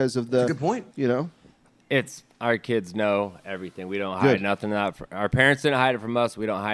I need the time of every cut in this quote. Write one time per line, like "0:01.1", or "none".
none